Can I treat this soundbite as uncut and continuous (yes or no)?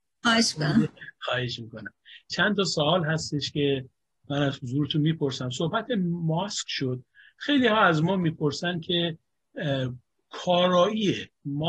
yes